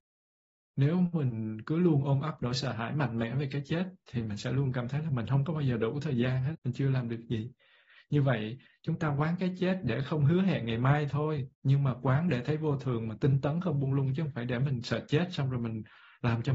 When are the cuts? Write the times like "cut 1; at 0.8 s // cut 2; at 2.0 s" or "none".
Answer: cut 1; at 6.5 s // cut 2; at 11.5 s